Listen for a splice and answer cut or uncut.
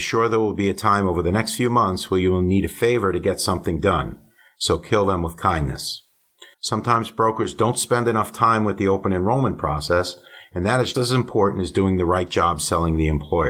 cut